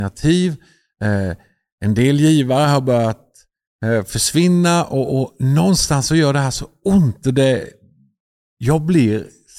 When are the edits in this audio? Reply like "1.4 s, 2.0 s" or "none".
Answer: none